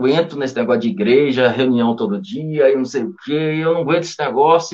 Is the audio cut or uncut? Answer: uncut